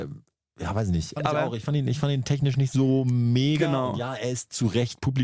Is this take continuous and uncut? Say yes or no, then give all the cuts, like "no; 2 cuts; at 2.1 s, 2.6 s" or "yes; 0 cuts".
no; 1 cut; at 1.2 s